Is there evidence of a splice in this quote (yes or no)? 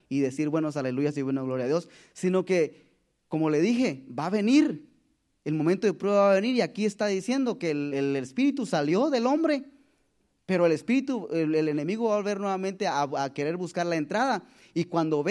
yes